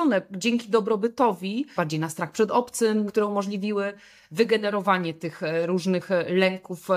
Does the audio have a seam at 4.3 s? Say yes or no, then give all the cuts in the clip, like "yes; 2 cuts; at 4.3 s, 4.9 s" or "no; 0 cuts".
no; 2 cuts; at 1.8 s, 3.1 s